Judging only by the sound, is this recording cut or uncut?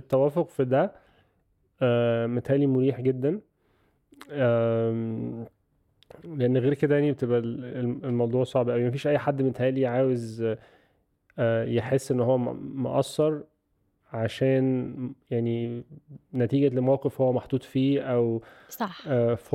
uncut